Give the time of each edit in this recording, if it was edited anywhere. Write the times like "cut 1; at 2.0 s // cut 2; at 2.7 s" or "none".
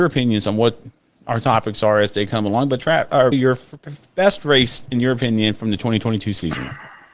cut 1; at 3.3 s